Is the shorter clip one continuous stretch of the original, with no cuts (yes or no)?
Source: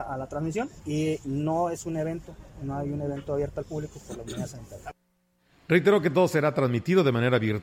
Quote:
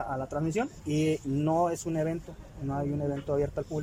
yes